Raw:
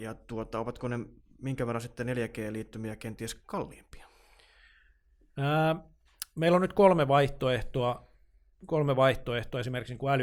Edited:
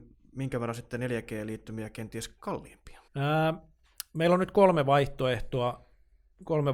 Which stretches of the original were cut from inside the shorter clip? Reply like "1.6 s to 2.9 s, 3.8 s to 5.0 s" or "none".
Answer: 4.1 s to 5.3 s